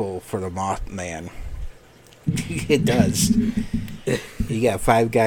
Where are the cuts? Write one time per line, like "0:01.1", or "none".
0:02.2